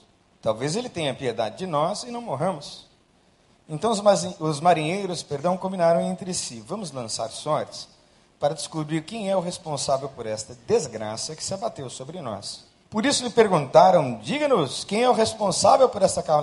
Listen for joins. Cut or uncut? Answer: cut